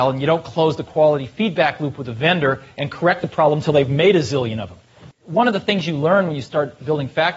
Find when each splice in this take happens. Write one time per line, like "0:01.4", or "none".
0:05.1